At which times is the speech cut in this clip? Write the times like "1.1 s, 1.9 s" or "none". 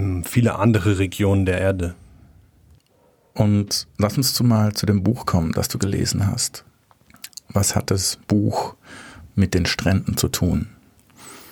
none